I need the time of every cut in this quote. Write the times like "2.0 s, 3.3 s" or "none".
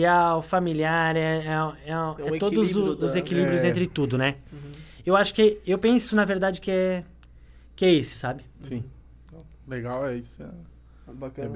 none